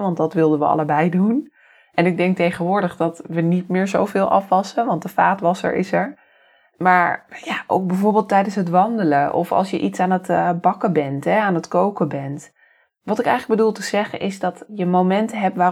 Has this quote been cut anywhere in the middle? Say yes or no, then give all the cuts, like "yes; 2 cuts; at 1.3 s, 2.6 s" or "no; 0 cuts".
no; 0 cuts